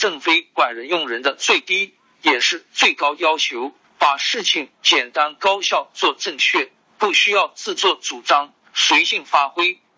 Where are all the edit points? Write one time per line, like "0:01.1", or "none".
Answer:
0:03.8